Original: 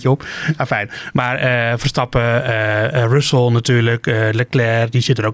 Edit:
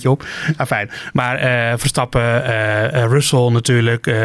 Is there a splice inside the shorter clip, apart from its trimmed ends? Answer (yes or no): no